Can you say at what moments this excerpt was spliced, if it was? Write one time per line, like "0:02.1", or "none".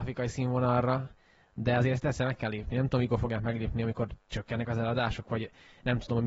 none

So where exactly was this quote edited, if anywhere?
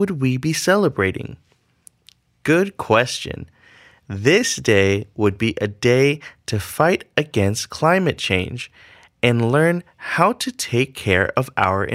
none

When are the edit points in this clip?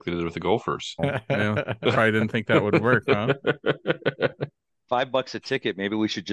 0:01.0

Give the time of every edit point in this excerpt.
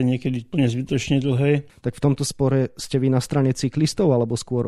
0:01.7

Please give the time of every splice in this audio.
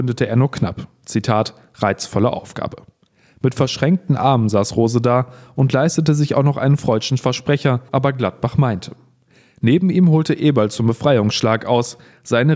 0:07.9

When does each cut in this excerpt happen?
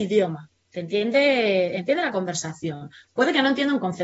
none

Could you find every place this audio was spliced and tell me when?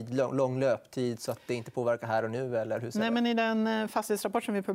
none

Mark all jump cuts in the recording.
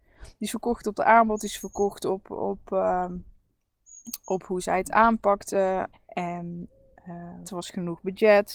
0:05.9
0:07.4

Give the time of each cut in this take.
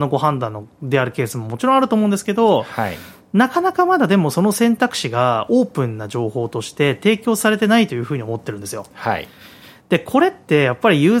none

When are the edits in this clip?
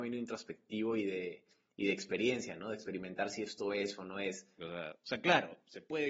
0:04.6

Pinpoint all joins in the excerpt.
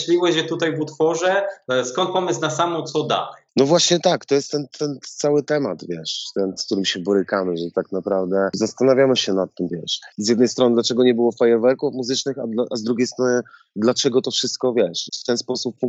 0:06.6
0:09.7

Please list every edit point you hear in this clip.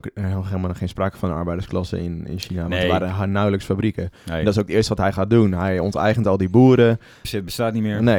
0:07.2

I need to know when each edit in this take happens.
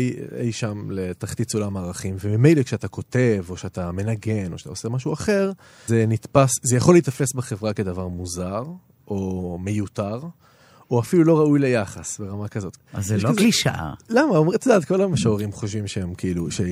0:05.9
0:12.8

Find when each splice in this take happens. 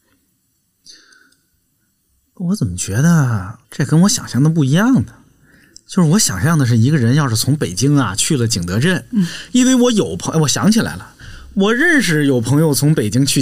0:03.6

